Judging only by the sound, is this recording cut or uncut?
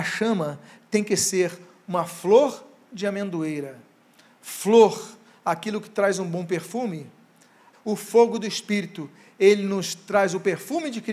cut